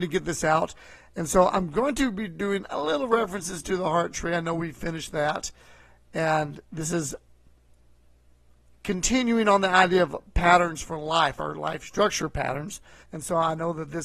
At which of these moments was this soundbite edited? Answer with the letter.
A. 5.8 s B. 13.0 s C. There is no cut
B